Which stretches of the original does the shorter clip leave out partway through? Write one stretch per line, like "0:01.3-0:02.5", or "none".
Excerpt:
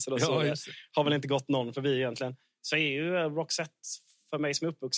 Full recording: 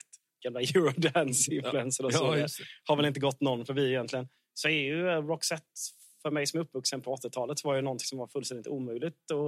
none